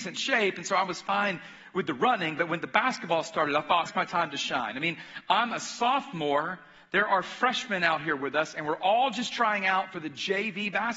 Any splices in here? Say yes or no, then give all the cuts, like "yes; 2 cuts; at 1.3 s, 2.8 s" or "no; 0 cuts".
yes; 1 cut; at 3.9 s